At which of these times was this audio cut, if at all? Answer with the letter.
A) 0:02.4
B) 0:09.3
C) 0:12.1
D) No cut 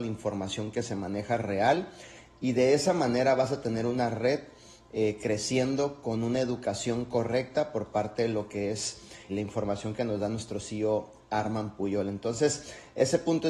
B